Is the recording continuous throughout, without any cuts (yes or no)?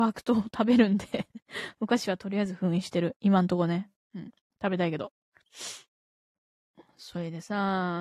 yes